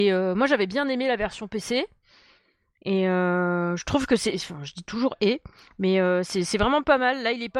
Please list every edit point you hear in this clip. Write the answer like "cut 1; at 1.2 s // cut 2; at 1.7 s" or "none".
none